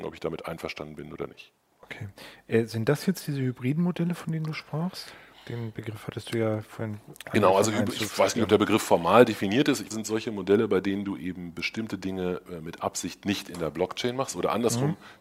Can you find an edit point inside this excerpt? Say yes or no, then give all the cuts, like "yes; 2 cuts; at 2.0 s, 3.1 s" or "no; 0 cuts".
yes; 1 cut; at 9.9 s